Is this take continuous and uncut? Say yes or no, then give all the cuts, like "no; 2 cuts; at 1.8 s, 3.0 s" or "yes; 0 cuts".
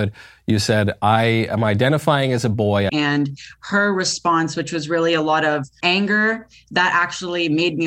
no; 2 cuts; at 2.9 s, 5.8 s